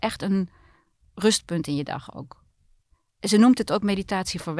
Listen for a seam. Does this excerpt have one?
no; 0 cuts

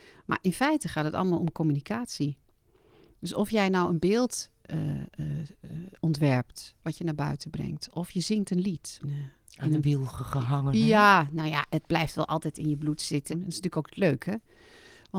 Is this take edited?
yes; 2 cuts; at 9.0 s, 13.3 s

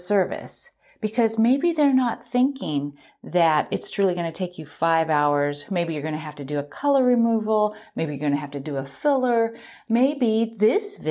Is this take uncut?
yes; 0 cuts

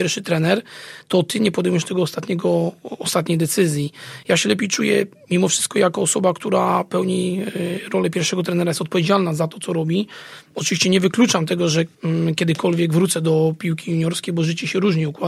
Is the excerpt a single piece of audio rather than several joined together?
no; 1 cut; at 4.2 s

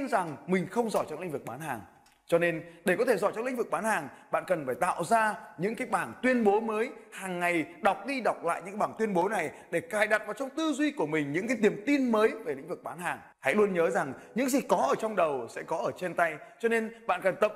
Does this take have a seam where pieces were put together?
yes; 1 cut; at 13.3 s

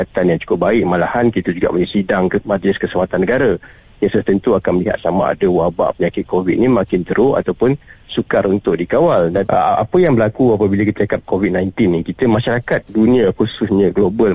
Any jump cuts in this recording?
yes; 1 cut; at 9.5 s

